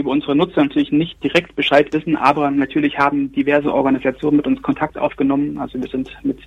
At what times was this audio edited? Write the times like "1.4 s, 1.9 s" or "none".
none